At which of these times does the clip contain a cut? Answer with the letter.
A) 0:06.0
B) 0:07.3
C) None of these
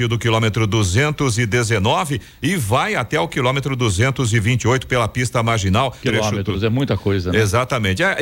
A